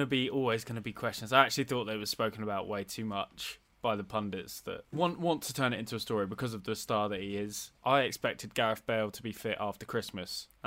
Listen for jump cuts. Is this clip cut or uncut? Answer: cut